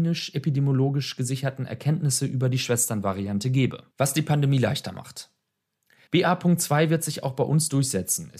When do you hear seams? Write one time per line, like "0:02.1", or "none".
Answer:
0:03.9
0:06.1